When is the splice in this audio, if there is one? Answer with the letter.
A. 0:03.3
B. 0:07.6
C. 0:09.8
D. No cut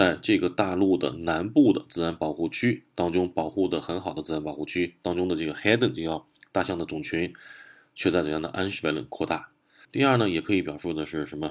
C